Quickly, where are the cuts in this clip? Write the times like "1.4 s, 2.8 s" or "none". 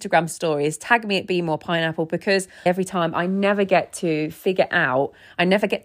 2.7 s